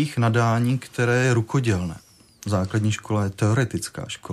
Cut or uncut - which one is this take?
uncut